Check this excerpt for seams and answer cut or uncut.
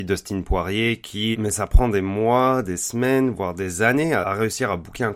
cut